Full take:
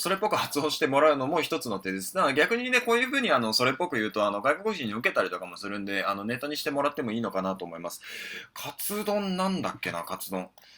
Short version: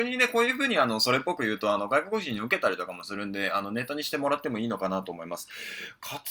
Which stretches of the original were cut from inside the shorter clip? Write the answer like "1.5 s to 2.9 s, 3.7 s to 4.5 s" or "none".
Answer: none

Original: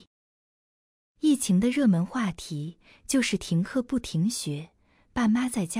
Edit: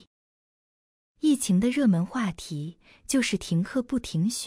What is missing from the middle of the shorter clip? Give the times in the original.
none

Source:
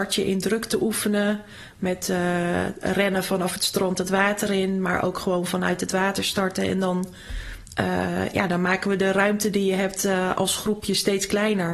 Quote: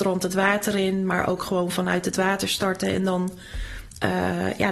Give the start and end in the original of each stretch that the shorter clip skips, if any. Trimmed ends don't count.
none

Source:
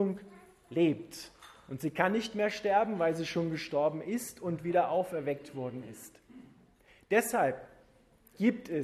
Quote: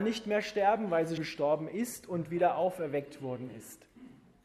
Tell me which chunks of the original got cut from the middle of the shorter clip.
3.3 s to 3.5 s

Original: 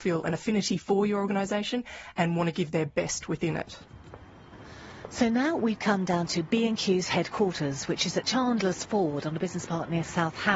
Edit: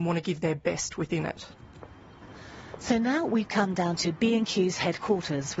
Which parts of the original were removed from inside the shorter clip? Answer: none

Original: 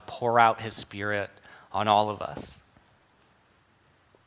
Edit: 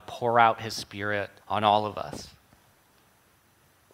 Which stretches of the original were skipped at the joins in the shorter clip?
1.4 s to 1.6 s

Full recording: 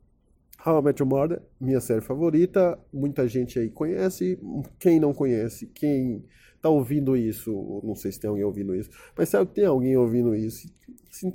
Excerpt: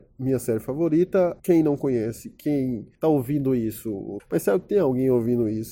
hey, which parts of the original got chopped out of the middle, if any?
2.8 s to 4.8 s, 6.3 s to 6.6 s, 7.8 s to 9.1 s

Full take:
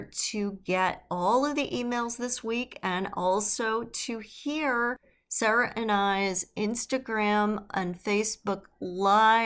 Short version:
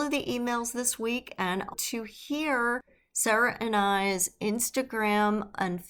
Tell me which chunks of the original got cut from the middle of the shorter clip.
3.1 s to 3.9 s

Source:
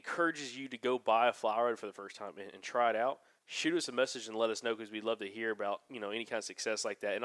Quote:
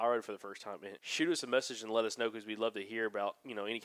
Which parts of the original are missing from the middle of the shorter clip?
2.5 s to 3.4 s

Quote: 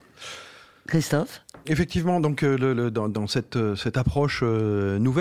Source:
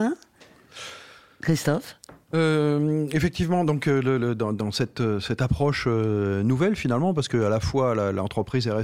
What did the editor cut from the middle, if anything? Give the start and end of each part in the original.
2.2 s to 3.1 s

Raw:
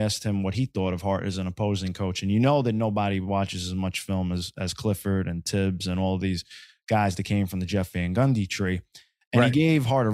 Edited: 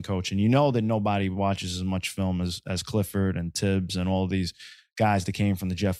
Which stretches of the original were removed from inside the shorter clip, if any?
none

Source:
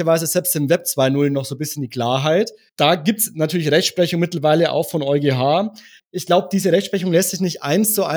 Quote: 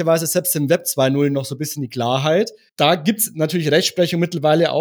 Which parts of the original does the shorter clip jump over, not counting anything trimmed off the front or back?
none

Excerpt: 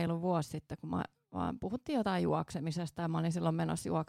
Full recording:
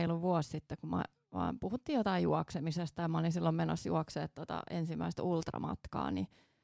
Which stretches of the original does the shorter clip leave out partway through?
none

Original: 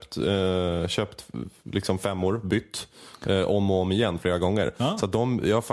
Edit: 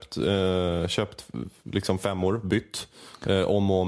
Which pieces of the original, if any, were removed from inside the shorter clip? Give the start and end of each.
none

